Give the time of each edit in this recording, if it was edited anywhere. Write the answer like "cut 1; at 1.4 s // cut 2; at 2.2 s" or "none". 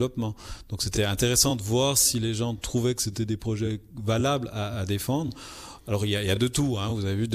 none